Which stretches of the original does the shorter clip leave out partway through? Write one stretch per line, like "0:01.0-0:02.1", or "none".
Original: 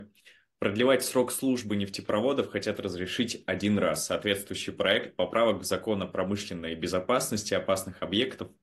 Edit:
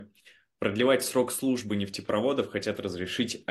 none